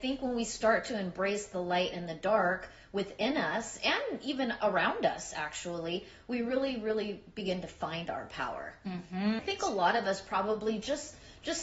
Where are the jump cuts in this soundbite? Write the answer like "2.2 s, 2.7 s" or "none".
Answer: 9.4 s